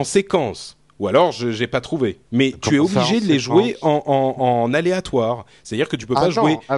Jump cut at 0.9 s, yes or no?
no